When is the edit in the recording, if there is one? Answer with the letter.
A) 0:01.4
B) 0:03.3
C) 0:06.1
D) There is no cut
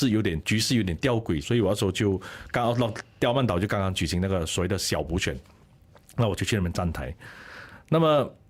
A